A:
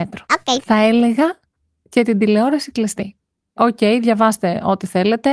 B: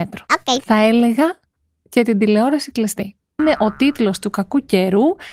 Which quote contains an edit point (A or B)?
B